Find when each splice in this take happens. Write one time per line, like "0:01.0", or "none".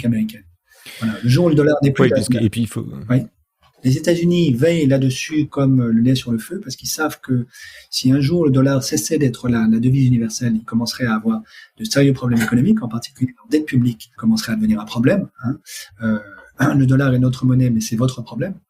0:03.7
0:14.1
0:15.9